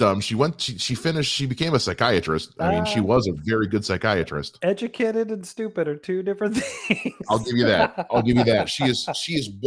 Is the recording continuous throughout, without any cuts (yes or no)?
yes